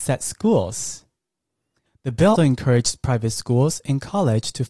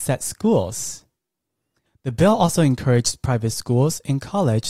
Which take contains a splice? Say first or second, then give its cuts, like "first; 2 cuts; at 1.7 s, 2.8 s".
first; 1 cut; at 2.4 s